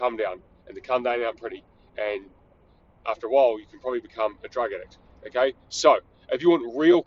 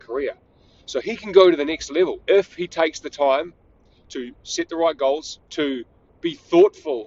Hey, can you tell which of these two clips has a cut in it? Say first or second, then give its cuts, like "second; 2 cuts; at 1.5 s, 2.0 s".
second; 2 cuts; at 2.2 s, 5.4 s